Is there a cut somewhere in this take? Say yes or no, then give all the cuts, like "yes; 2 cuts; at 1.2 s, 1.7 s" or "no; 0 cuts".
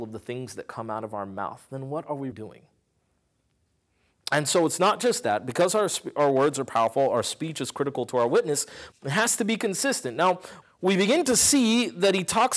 yes; 3 cuts; at 2.3 s, 8.9 s, 10.6 s